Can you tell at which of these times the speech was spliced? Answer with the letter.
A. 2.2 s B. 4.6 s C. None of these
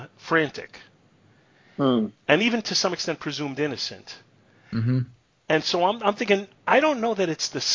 C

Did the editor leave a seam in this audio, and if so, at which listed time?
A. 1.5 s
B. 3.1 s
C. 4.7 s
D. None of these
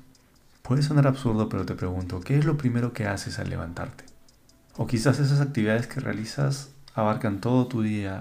C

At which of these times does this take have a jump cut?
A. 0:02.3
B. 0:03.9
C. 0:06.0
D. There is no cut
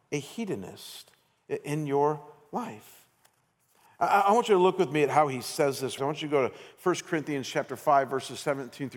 C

